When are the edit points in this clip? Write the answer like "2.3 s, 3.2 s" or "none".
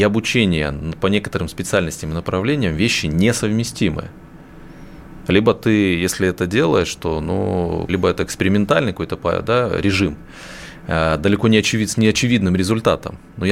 7.9 s